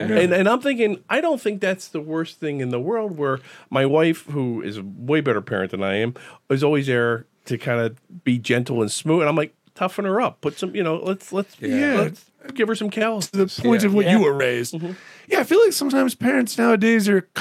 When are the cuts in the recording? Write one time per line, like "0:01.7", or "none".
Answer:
0:14.0